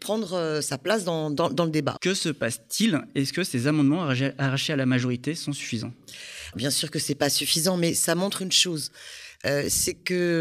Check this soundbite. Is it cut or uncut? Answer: cut